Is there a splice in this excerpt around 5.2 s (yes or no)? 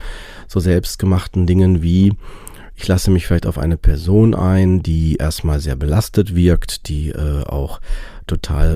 yes